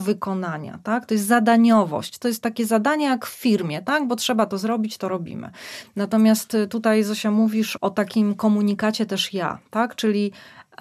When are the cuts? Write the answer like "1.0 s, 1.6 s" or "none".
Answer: 7.8 s